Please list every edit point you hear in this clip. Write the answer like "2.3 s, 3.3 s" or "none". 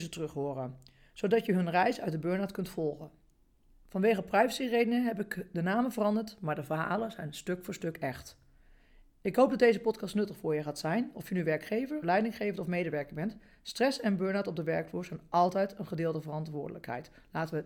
12.0 s